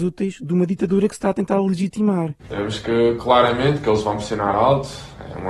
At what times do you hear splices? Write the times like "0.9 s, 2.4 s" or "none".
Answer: 2.4 s